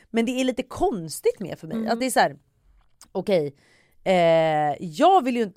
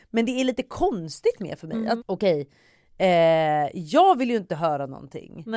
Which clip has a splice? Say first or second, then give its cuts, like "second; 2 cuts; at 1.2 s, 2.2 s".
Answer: second; 1 cut; at 2.0 s